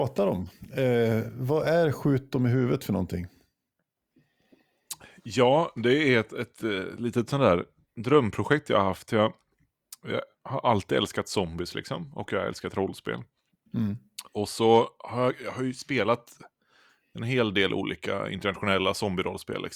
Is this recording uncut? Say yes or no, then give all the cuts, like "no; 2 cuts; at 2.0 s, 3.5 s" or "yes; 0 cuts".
yes; 0 cuts